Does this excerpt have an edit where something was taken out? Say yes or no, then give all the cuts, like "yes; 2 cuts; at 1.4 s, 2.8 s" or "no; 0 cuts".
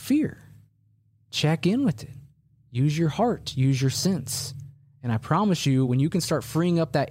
no; 0 cuts